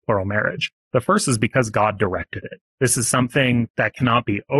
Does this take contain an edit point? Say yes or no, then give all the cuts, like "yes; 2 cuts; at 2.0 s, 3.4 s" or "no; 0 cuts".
no; 0 cuts